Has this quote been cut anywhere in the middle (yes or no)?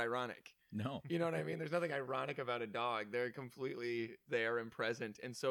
yes